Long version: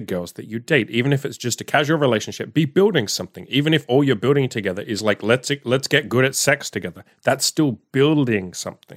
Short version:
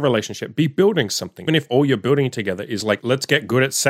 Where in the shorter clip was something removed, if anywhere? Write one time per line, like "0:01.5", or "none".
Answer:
0:01.5
0:03.0